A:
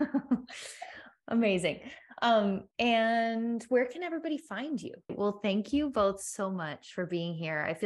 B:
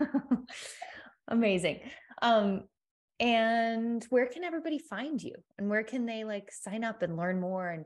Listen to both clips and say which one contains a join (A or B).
A